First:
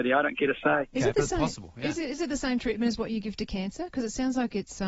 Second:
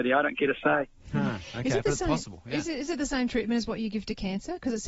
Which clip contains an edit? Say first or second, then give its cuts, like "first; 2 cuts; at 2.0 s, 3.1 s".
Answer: first; 1 cut; at 0.9 s